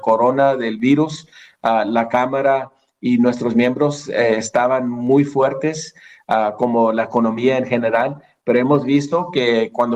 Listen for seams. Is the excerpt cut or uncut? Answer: uncut